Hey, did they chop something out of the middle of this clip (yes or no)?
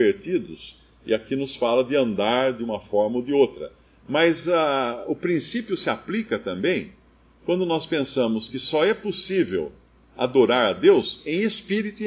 no